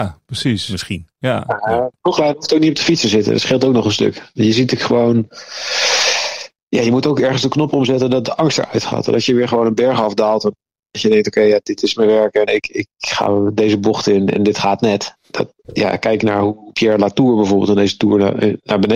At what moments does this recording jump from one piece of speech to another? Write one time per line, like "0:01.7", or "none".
0:12.5